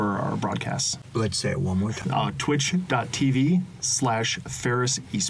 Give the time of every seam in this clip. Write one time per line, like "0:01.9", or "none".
0:02.0